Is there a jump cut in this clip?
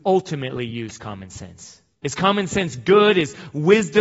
no; 0 cuts

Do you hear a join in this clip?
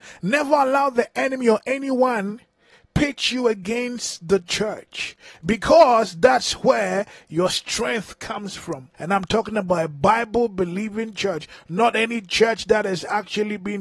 yes; 1 cut; at 8.9 s

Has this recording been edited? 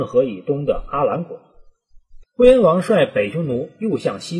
yes; 1 cut; at 2.2 s

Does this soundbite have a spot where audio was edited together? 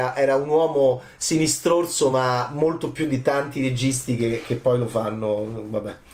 no; 0 cuts

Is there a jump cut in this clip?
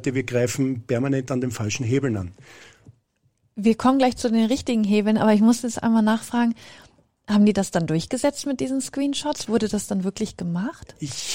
no; 0 cuts

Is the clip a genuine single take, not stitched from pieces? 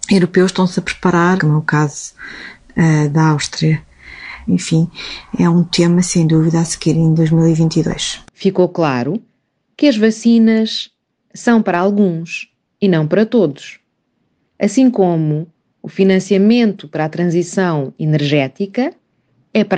no; 3 cuts; at 1.4 s, 4.5 s, 8.2 s

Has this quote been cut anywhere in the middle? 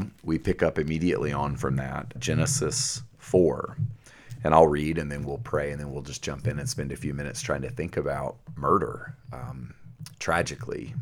yes; 1 cut; at 2.2 s

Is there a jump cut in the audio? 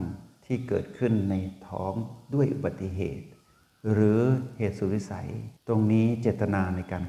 yes; 1 cut; at 5.6 s

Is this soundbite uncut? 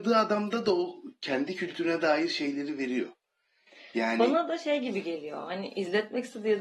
yes; 0 cuts

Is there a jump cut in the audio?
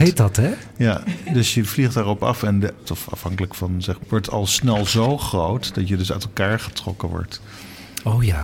yes; 2 cuts; at 2.8 s, 4.0 s

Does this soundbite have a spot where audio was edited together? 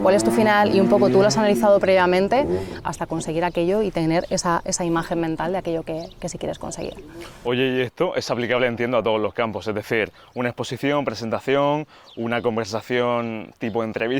yes; 1 cut; at 2.8 s

